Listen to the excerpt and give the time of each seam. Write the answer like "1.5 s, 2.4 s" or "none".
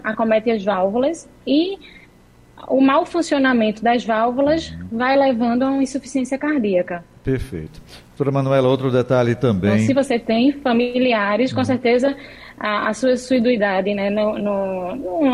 none